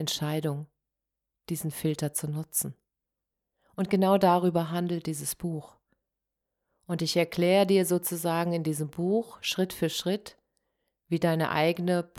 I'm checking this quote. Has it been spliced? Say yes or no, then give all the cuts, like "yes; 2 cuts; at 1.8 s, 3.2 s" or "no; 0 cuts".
no; 0 cuts